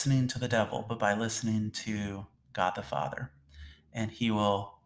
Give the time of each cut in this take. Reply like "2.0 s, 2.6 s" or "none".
none

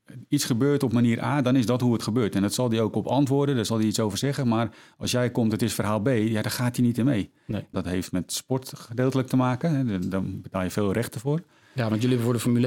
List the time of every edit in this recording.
7.7 s

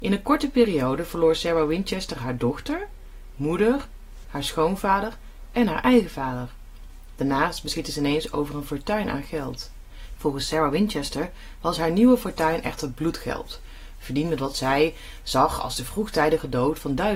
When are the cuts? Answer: 4.2 s, 10.2 s

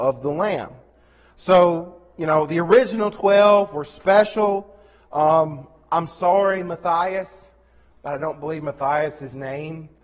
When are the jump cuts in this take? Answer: none

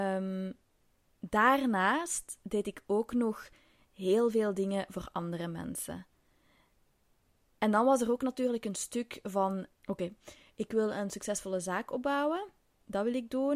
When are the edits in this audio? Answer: 9.7 s

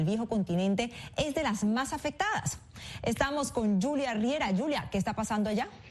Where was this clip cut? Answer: none

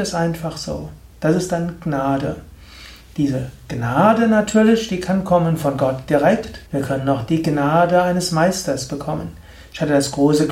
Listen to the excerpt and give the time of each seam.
6.7 s

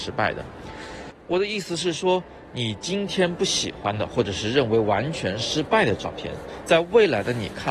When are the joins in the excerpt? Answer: 1.1 s

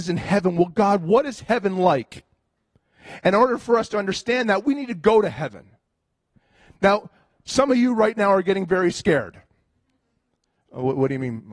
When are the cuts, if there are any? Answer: none

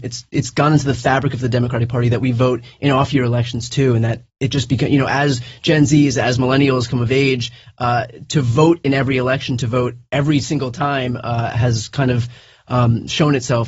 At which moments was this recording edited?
none

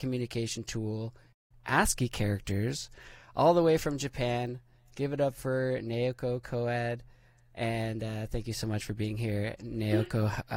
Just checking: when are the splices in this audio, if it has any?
none

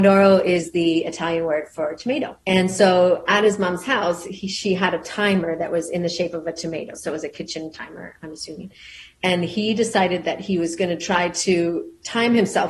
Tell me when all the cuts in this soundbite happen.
2.4 s

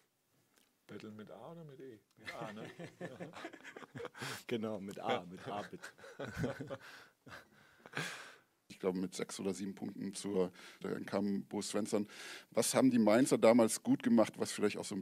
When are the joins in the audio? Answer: 8.7 s, 10.8 s

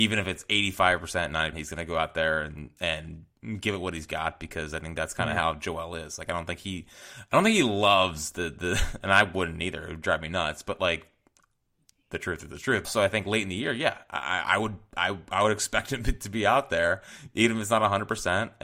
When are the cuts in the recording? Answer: 1.5 s, 12.8 s

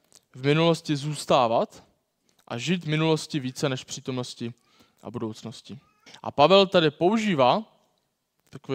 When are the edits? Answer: 6.1 s

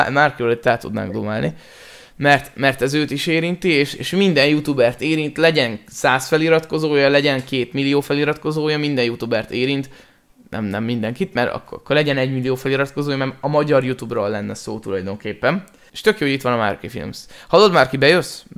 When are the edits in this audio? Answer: 15.9 s

